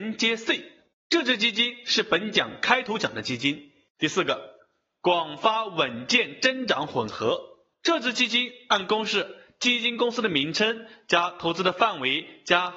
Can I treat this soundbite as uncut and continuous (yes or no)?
no